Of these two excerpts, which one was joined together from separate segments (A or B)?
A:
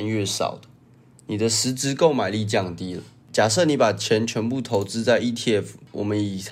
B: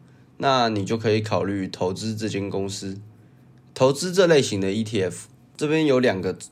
B